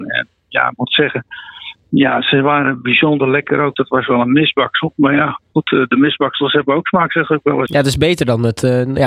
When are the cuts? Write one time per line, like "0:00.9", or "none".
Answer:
0:03.7
0:07.7